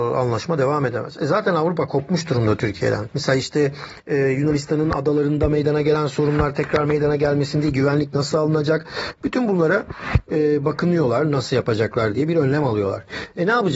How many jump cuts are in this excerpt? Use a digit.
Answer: 1